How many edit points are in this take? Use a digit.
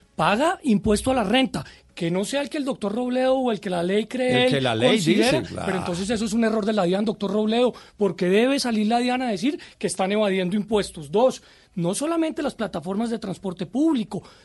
0